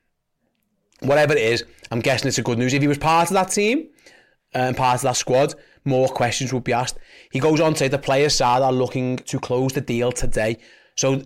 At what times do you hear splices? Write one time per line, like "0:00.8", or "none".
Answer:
none